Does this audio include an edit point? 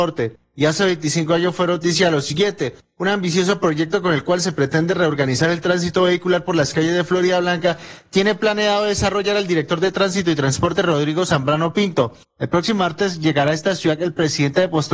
yes; 1 cut; at 12.3 s

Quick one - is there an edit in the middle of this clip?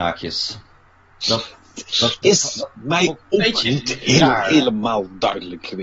yes; 1 cut; at 2.2 s

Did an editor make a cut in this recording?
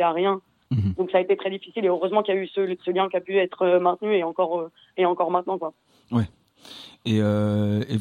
no; 0 cuts

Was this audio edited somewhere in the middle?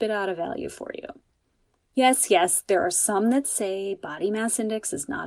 no; 0 cuts

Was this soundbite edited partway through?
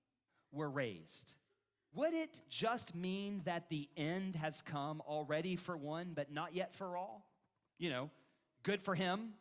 yes; 1 cut; at 1.9 s

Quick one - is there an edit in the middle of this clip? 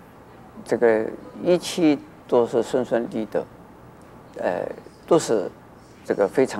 yes; 1 cut; at 3.1 s

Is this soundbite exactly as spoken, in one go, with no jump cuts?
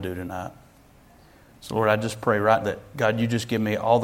no; 1 cut; at 2.6 s

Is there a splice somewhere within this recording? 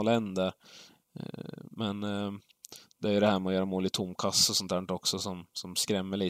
no; 0 cuts

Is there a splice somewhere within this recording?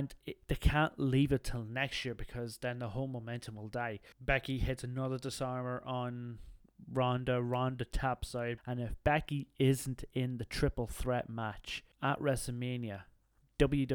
yes; 3 cuts; at 4.1 s, 8.6 s, 11.9 s

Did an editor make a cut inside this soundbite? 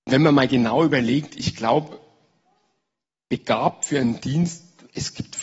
no; 0 cuts

